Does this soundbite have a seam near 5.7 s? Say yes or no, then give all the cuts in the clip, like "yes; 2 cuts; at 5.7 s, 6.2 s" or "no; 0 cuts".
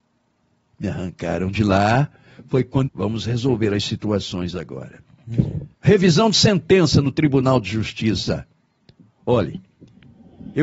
yes; 2 cuts; at 2.9 s, 5.7 s